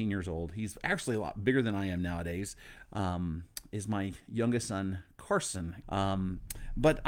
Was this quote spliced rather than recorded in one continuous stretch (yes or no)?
yes